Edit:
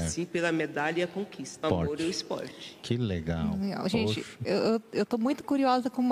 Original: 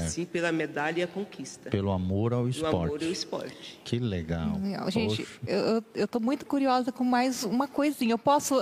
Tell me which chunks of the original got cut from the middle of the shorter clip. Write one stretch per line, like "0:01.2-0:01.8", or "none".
0:01.6-0:02.7